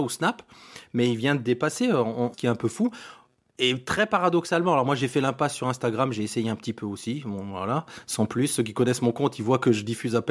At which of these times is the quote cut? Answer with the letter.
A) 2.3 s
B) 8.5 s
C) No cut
A